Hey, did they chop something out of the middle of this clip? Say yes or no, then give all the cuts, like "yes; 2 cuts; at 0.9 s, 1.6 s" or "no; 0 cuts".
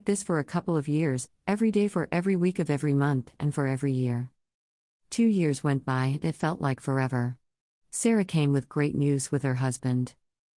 no; 0 cuts